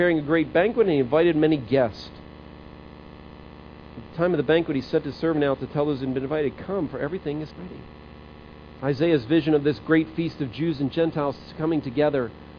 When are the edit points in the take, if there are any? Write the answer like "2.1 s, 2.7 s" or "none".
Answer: 7.5 s, 8.8 s